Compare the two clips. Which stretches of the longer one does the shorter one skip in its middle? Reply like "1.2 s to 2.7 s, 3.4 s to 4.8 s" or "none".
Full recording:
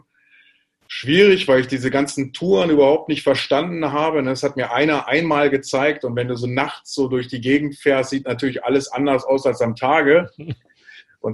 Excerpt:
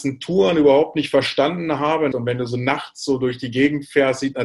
4.2 s to 6.0 s